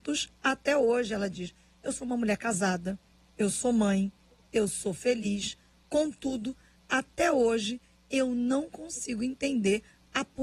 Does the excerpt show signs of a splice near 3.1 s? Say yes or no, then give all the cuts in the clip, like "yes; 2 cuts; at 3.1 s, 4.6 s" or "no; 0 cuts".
no; 0 cuts